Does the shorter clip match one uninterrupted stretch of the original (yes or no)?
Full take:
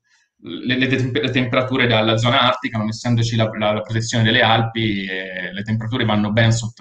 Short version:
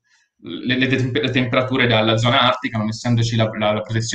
yes